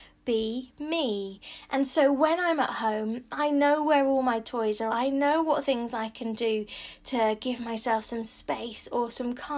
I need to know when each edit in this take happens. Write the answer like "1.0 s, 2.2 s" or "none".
4.9 s